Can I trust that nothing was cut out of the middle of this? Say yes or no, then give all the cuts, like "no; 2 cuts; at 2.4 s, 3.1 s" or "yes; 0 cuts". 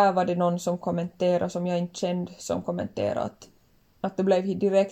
no; 1 cut; at 3.9 s